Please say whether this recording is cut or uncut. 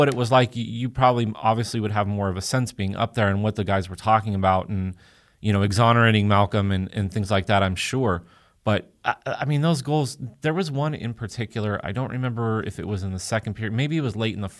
uncut